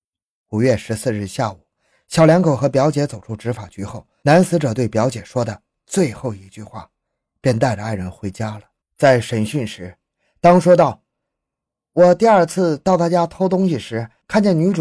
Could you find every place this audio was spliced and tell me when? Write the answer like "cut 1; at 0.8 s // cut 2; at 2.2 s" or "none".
cut 1; at 8.8 s